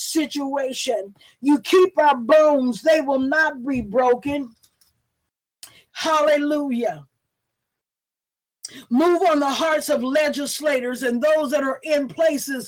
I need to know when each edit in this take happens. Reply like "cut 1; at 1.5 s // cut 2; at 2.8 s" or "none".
cut 1; at 5.9 s